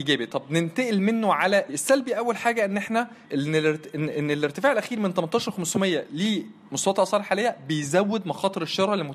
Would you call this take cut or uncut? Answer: cut